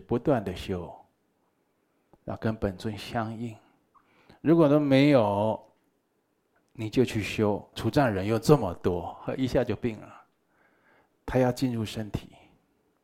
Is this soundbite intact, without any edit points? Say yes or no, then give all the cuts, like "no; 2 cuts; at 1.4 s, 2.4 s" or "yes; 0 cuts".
no; 2 cuts; at 7.7 s, 11.1 s